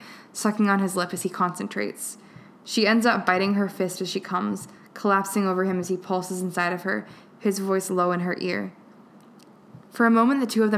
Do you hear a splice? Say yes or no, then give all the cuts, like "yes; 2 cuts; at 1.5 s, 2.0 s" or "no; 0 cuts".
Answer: no; 0 cuts